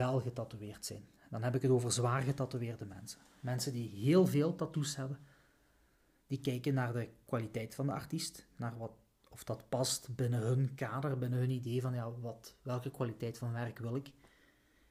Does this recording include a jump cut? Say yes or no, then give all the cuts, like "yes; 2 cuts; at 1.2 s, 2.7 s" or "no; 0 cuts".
no; 0 cuts